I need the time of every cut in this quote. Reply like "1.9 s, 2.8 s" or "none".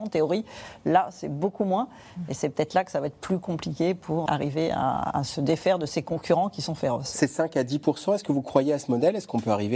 4.3 s